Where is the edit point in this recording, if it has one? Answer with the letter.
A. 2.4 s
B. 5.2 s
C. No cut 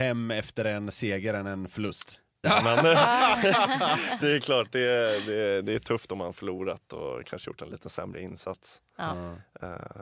A